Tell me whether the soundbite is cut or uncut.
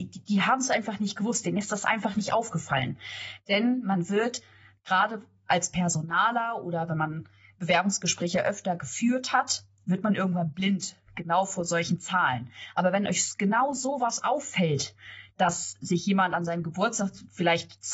uncut